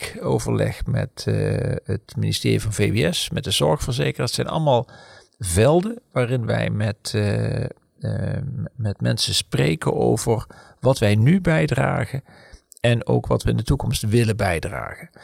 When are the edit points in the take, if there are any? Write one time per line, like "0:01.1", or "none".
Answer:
none